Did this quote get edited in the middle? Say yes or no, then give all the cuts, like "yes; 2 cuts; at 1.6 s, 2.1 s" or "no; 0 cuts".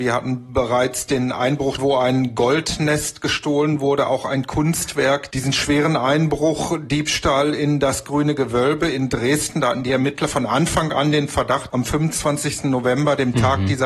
yes; 2 cuts; at 1.8 s, 11.7 s